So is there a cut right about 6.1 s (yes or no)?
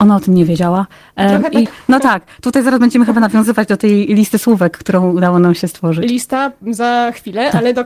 no